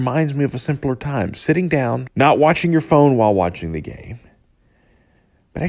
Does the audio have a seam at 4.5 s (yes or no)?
no